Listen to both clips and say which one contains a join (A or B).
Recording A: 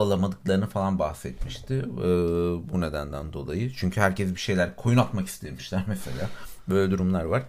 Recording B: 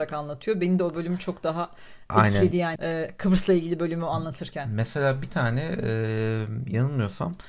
B